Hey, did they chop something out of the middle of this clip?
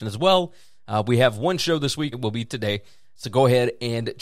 yes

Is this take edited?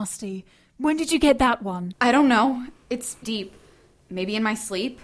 yes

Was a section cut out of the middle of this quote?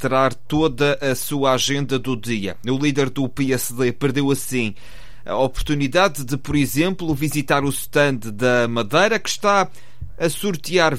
no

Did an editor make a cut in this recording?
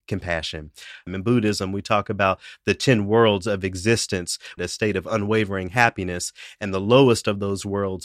yes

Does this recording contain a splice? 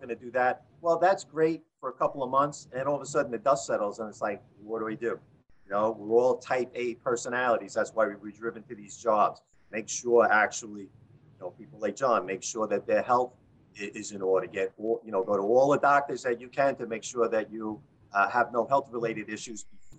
yes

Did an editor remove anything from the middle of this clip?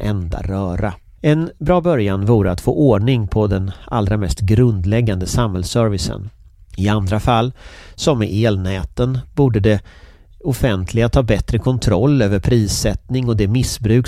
yes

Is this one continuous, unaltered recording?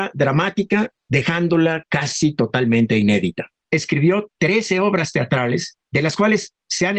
yes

